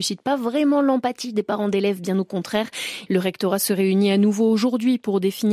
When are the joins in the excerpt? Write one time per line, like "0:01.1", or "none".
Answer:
0:03.1